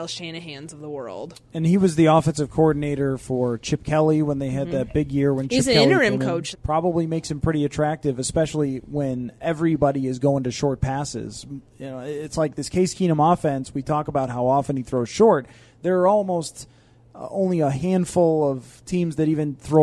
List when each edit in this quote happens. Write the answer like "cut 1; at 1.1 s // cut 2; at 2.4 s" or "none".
cut 1; at 6.5 s